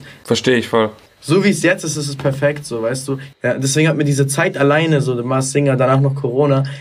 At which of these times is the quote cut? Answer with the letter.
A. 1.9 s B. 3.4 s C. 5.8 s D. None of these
D